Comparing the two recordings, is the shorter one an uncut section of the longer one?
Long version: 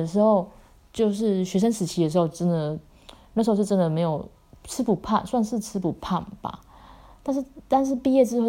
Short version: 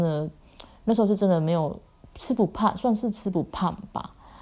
yes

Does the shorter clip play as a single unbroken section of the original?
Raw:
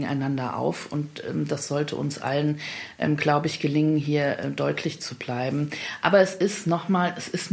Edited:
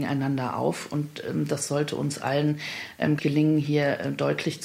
no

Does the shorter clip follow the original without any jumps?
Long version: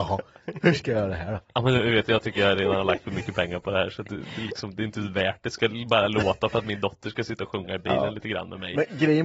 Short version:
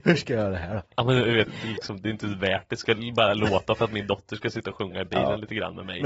no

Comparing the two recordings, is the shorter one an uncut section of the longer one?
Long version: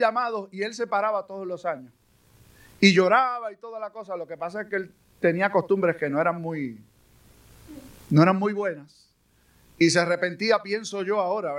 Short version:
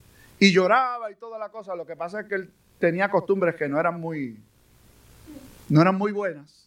yes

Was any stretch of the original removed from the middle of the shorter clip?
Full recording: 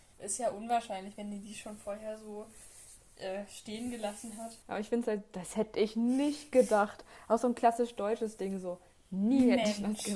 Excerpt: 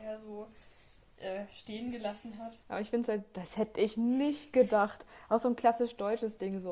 no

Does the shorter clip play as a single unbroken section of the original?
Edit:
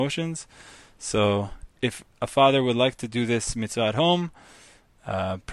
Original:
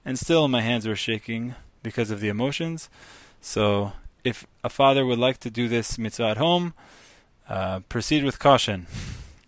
yes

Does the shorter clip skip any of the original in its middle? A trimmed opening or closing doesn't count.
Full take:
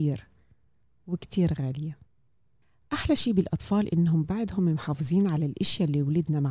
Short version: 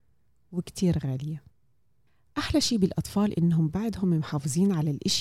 no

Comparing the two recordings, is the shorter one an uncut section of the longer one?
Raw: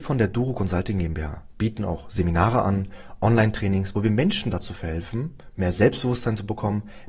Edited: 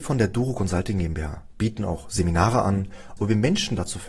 no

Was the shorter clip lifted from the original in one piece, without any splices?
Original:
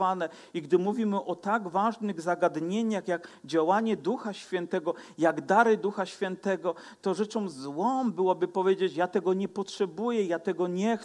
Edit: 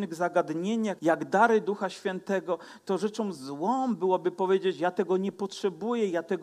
no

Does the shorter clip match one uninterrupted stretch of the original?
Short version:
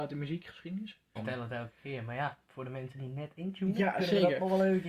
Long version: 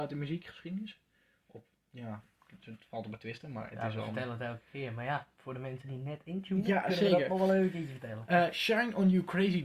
no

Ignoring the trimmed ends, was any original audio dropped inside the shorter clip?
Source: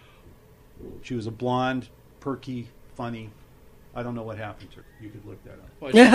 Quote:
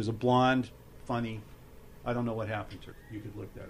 yes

